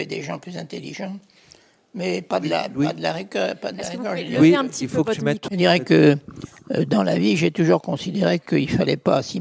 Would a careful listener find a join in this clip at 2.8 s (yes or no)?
no